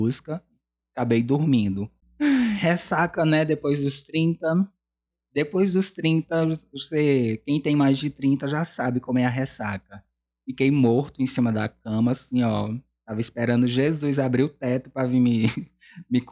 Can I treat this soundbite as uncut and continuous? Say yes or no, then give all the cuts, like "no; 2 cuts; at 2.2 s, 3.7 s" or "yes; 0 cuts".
yes; 0 cuts